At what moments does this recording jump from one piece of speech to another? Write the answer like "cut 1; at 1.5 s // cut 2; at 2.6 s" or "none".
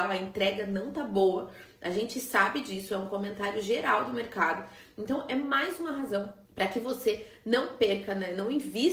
cut 1; at 6.5 s